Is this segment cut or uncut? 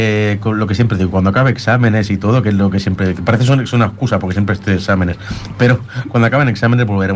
uncut